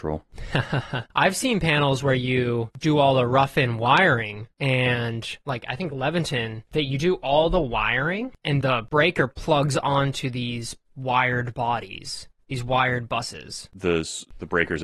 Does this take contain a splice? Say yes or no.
yes